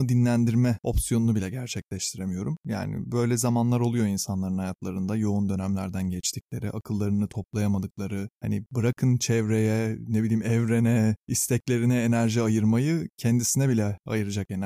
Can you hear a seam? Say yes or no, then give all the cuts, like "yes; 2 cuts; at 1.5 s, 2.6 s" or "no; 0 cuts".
yes; 1 cut; at 2.6 s